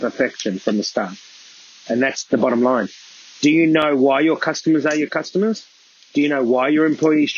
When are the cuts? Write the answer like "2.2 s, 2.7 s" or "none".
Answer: none